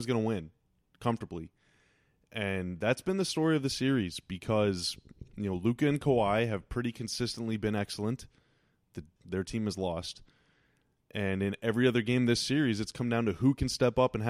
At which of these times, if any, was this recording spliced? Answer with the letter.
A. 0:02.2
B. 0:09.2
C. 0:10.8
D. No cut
B